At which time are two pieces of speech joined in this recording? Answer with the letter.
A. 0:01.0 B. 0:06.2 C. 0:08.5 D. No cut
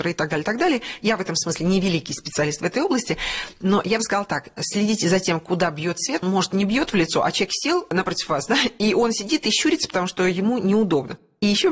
B